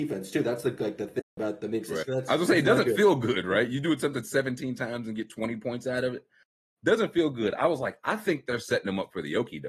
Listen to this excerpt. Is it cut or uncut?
cut